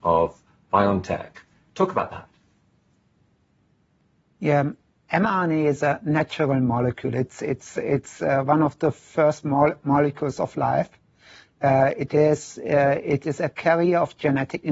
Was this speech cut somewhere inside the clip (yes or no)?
no